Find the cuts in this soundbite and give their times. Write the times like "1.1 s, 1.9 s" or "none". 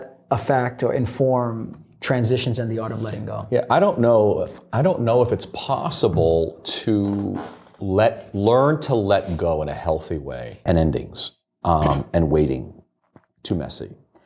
10.7 s

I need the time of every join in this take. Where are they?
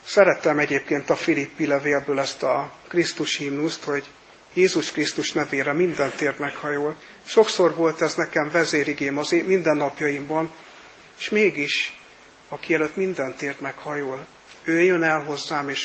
11.1 s, 14.6 s

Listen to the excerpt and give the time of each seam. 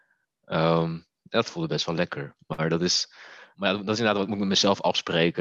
3.5 s

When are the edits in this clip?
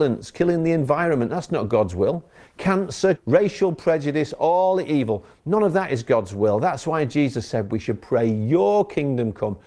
3.2 s

